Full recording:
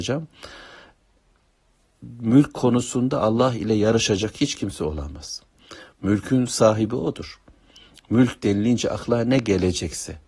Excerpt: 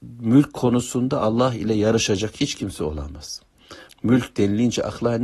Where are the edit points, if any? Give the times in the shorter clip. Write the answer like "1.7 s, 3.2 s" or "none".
3.9 s